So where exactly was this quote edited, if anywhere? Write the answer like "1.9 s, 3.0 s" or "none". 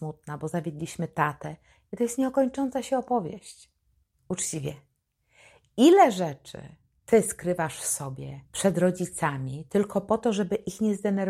4.2 s, 8.5 s